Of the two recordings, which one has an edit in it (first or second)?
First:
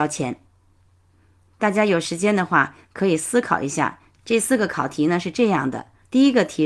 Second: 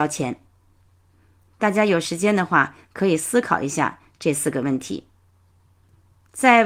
first